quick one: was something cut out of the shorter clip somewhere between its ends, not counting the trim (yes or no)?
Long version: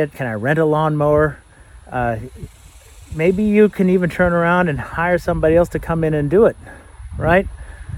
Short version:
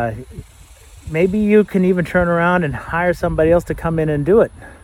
no